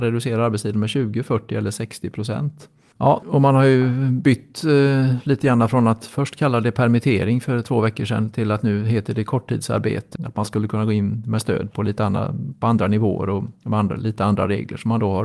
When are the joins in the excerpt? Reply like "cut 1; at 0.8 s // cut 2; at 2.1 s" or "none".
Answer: cut 1; at 2.9 s // cut 2; at 10.2 s